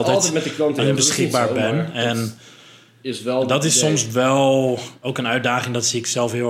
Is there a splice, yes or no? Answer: no